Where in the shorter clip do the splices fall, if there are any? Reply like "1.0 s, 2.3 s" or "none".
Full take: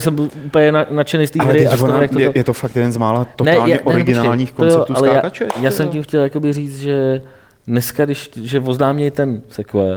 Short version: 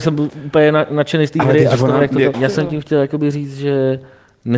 2.3 s